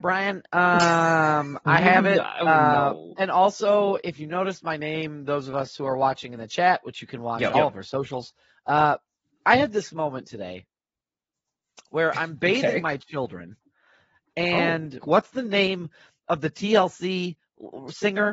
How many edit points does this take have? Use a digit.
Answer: 2